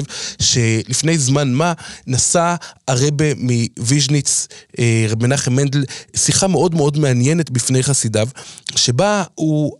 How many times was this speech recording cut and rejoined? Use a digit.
0